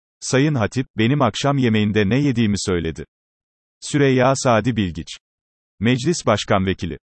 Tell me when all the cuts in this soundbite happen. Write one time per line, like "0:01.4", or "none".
none